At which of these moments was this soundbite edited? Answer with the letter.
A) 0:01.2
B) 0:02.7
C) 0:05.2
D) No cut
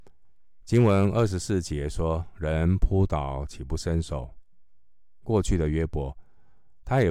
C